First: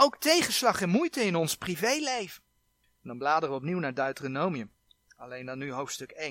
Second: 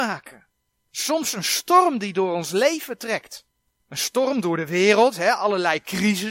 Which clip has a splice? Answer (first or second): first